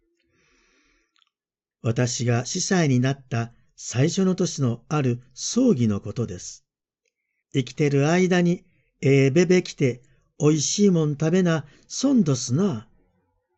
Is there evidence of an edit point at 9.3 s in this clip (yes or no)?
no